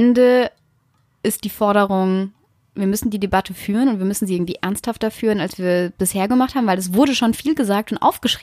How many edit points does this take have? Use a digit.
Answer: 0